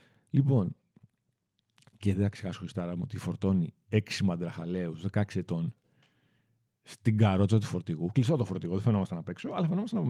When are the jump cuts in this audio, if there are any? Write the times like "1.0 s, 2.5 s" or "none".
none